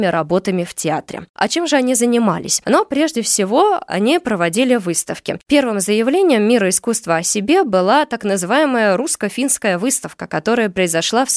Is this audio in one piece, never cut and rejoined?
no; 1 cut; at 1.3 s

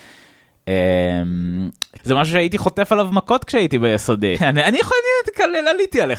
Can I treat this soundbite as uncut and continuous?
no; 2 cuts; at 2.0 s, 4.4 s

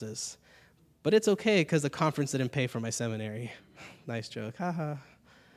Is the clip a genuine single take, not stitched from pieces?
no; 1 cut; at 3.6 s

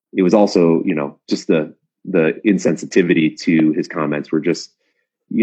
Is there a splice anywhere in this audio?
no; 0 cuts

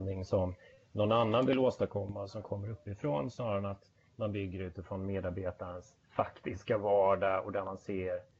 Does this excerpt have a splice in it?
yes; 1 cut; at 6.0 s

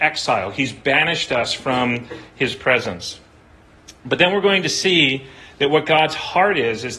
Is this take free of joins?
yes; 0 cuts

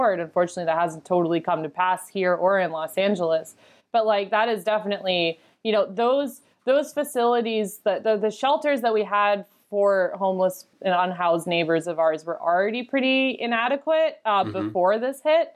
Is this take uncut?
yes; 0 cuts

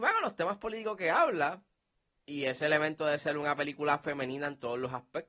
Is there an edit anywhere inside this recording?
no; 0 cuts

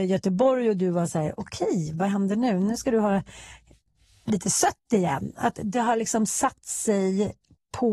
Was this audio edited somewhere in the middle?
no; 0 cuts

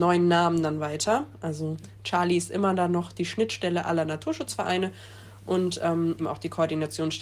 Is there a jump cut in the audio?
yes; 1 cut; at 6.2 s

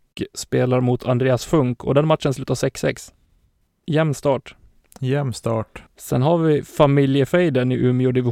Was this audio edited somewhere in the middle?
yes; 2 cuts; at 3.7 s, 5.9 s

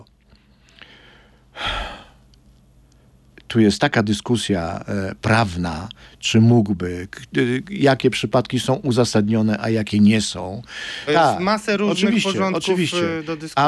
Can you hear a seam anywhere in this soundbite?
yes; 1 cut; at 11.1 s

